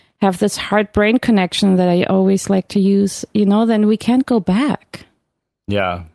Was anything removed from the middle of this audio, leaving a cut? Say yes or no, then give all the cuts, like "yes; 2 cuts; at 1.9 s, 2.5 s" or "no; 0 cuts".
no; 0 cuts